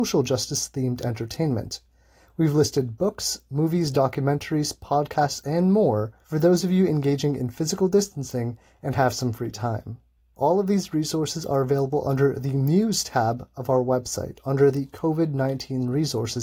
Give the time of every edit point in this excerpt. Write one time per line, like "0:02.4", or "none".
none

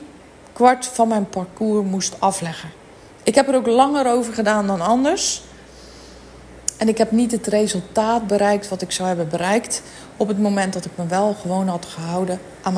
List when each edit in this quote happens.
none

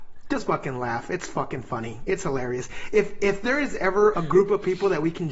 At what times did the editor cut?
0:04.1

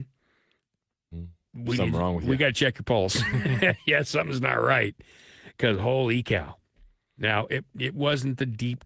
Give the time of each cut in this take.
0:07.2

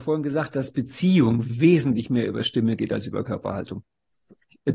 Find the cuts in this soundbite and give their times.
none

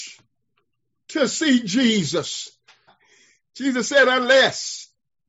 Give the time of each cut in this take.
0:02.9

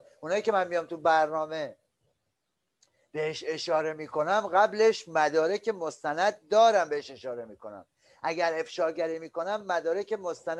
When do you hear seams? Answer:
none

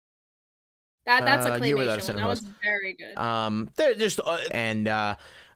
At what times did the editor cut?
0:03.1
0:04.5

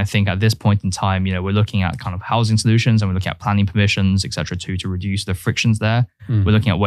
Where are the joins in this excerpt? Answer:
none

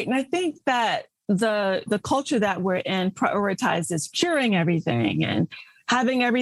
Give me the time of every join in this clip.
0:01.9

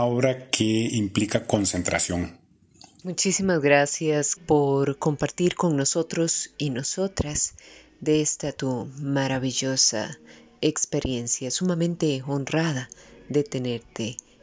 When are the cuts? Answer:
0:03.0
0:04.4

